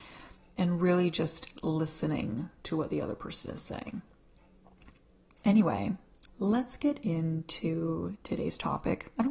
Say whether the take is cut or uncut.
cut